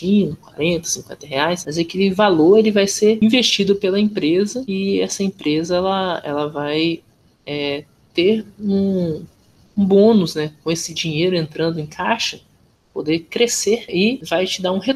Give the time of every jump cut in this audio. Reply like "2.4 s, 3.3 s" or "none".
13.9 s